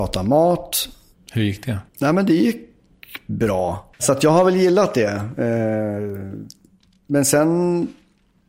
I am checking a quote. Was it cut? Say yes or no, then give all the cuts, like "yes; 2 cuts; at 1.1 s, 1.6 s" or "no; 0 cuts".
yes; 2 cuts; at 1.9 s, 3.9 s